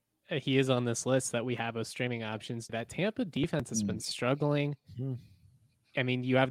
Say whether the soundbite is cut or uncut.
cut